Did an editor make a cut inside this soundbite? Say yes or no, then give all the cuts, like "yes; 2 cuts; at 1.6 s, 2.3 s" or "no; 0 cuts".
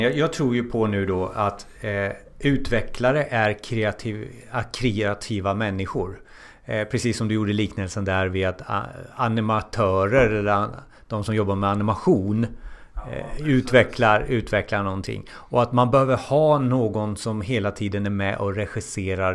no; 0 cuts